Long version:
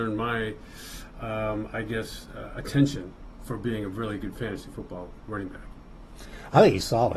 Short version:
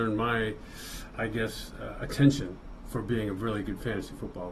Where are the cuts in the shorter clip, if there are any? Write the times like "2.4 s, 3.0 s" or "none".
1.1 s

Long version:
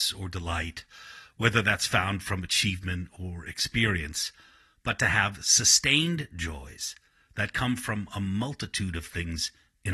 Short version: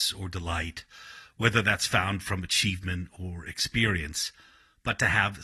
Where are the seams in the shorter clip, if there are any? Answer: none

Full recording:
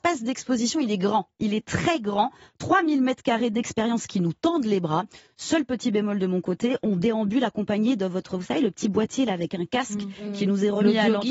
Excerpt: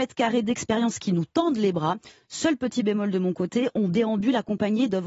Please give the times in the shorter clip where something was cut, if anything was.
none

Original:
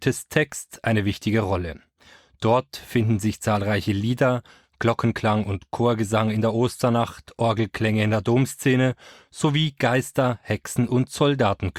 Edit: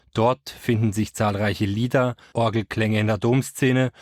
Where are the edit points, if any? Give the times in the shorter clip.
2.3 s

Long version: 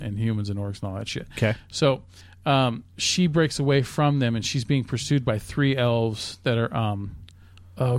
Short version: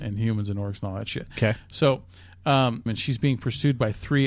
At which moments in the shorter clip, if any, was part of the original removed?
2.9 s

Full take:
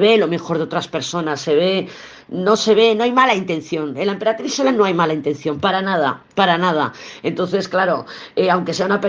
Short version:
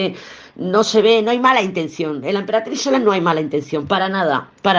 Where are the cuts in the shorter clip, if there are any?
none

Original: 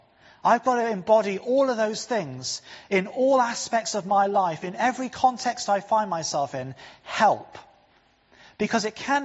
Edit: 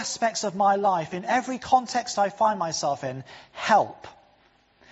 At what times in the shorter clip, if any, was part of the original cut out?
none

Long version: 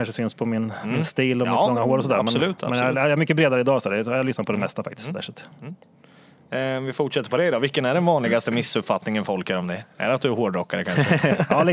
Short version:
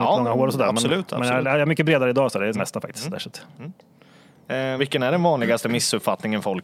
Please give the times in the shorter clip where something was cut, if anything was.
2.5 s, 4.8 s

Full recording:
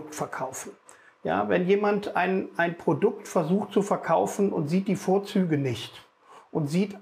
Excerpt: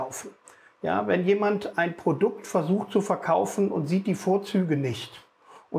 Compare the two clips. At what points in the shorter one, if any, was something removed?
1.7 s

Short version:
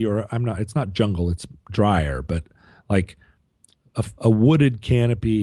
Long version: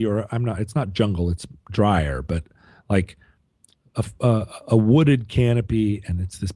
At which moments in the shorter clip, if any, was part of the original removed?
4.2 s

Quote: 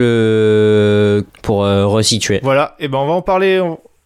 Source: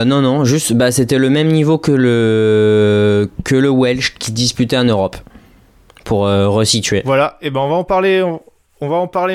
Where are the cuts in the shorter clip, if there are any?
1.3 s

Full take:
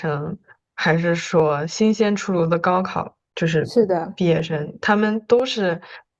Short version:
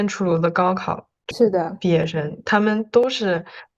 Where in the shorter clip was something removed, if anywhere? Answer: 1.3 s

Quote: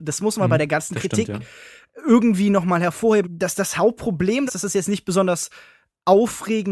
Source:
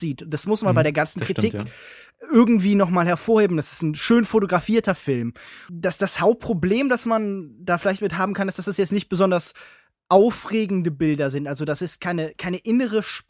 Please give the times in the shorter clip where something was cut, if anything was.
3.2 s, 4.5 s

